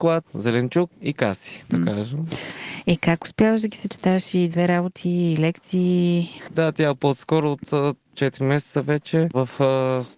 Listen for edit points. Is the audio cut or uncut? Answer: cut